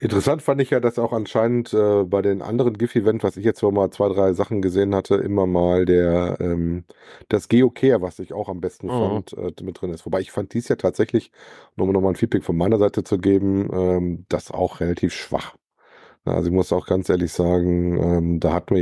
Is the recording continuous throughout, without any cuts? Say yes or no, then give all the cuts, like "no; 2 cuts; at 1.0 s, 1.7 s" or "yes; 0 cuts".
yes; 0 cuts